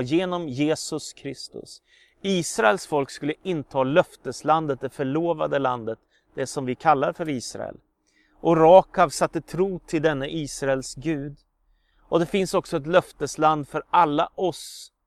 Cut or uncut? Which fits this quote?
uncut